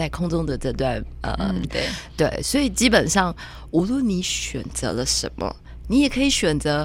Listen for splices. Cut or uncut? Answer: cut